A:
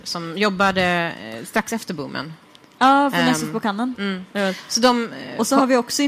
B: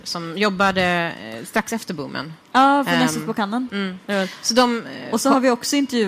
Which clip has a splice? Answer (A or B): B